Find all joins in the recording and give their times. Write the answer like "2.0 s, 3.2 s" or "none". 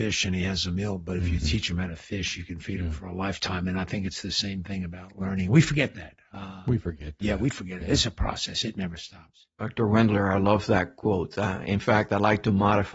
none